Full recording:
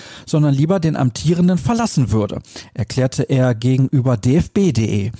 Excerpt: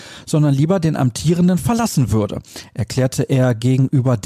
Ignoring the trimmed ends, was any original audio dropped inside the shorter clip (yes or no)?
no